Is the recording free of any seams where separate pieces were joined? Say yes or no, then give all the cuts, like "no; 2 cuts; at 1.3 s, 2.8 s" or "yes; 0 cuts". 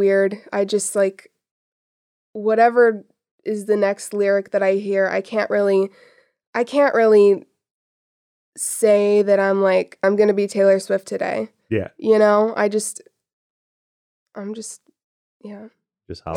no; 1 cut; at 10.0 s